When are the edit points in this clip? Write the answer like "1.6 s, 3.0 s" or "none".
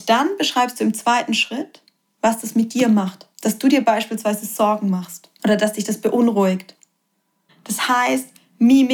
3.3 s, 7.5 s